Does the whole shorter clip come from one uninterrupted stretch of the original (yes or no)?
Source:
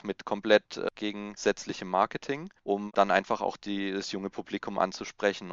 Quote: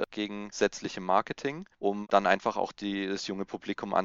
yes